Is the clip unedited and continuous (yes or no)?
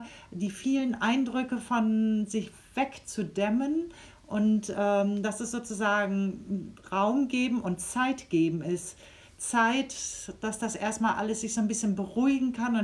yes